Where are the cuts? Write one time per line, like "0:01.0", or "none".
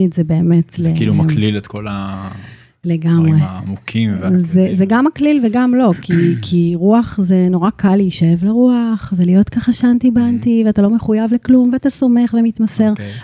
none